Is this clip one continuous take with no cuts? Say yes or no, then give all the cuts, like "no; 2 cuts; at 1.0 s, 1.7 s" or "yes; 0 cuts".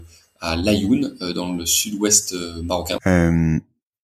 no; 1 cut; at 3.0 s